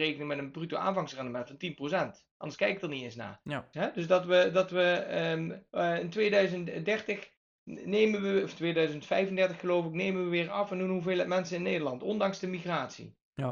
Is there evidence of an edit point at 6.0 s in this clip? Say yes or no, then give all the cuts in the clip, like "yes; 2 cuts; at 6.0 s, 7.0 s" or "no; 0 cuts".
no; 1 cut; at 3.7 s